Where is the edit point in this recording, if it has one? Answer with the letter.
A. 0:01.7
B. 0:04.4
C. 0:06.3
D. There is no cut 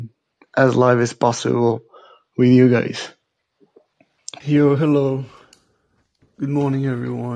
B